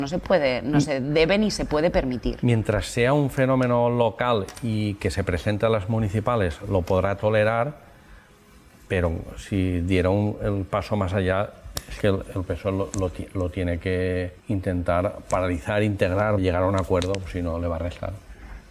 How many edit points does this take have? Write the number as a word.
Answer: two